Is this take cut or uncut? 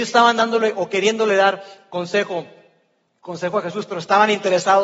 uncut